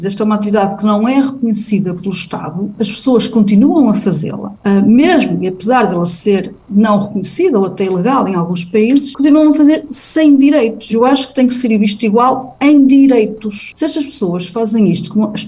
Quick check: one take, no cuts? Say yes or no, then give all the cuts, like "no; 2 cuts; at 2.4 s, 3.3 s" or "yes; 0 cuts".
no; 1 cut; at 10.9 s